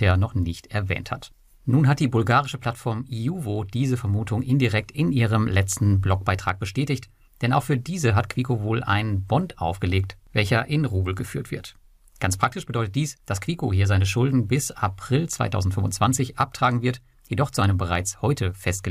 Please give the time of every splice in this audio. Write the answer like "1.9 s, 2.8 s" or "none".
none

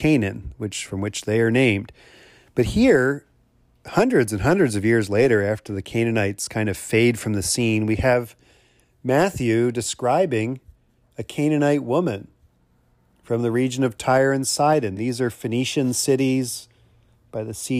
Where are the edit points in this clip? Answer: none

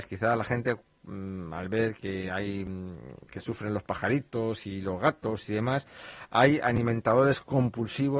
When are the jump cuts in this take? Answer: 2.0 s, 3.2 s

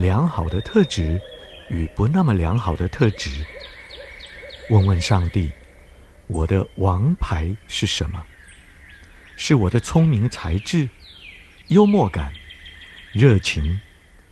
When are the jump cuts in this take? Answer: 11.6 s

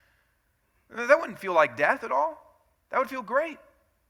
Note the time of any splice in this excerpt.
none

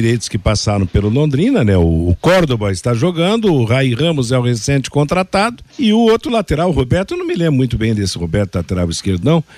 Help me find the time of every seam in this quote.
5.7 s

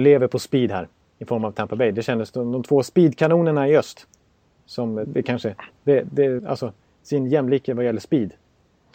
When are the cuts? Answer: 5.0 s, 6.4 s

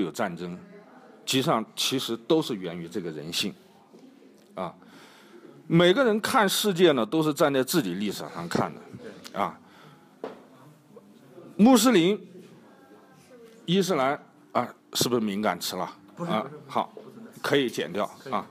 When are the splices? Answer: none

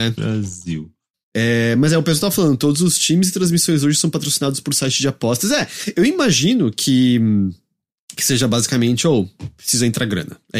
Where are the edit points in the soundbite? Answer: none

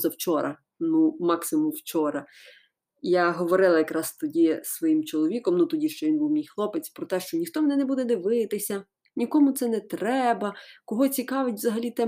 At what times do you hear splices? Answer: none

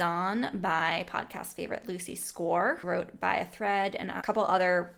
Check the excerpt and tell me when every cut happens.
2.8 s

